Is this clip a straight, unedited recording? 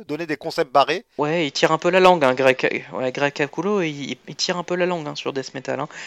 yes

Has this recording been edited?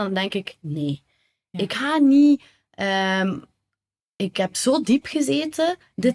no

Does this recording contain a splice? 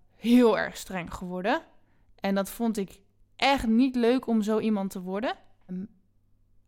yes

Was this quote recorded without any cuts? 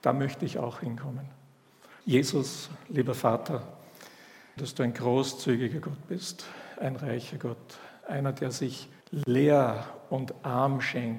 no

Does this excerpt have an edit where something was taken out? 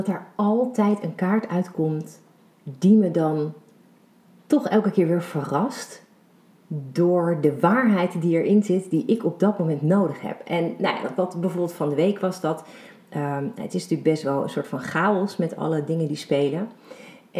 no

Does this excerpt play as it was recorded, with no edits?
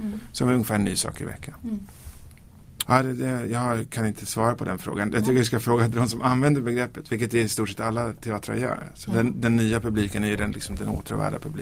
no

